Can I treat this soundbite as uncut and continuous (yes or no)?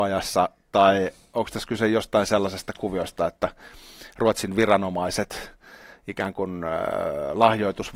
yes